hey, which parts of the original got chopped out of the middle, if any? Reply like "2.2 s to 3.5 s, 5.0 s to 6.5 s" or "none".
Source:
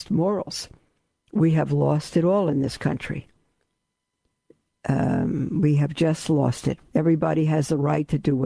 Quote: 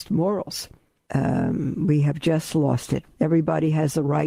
1.1 s to 4.8 s